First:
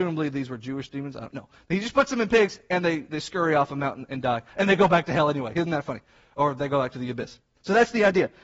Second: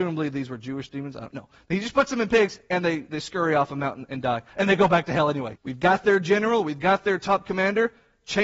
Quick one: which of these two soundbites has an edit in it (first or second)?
second